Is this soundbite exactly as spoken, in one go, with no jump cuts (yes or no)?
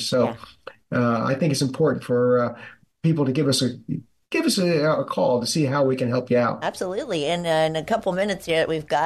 yes